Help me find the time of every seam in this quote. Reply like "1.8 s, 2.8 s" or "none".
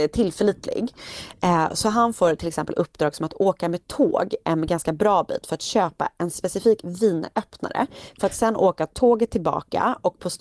none